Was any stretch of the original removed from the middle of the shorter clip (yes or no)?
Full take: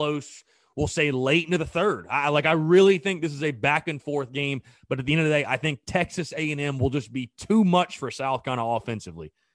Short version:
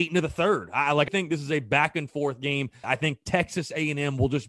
yes